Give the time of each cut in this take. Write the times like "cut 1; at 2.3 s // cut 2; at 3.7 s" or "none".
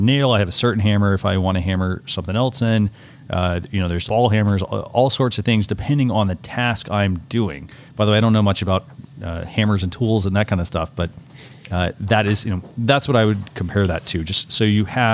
cut 1; at 4.1 s